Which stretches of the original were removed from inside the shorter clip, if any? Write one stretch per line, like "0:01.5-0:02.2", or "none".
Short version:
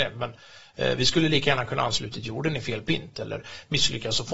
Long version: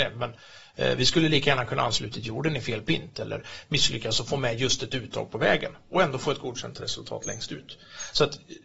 none